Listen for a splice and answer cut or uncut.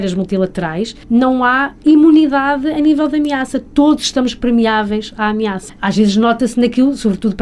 cut